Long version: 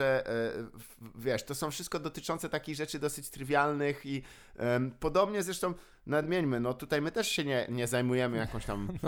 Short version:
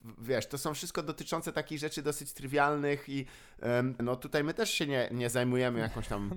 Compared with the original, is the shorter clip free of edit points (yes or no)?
no